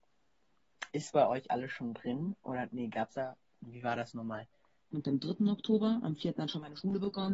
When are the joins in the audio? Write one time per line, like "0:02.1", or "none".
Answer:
0:00.9
0:04.9